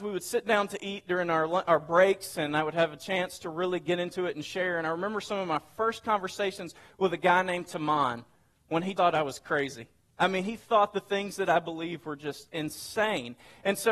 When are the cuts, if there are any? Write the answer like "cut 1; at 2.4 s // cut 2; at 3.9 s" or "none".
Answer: cut 1; at 9.0 s